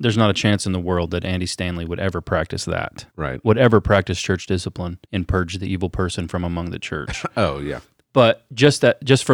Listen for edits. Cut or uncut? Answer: cut